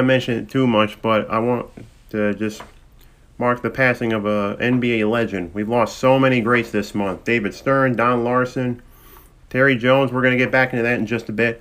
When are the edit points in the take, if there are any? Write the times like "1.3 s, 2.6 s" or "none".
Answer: none